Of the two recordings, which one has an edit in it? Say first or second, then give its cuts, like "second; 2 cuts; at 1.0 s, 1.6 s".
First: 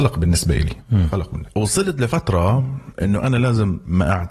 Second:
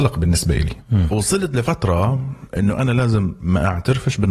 second; 1 cut; at 1.1 s